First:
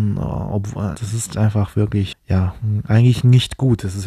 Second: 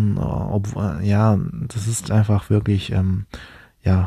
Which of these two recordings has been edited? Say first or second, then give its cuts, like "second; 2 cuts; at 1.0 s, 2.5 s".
first; 2 cuts; at 0.9 s, 2.1 s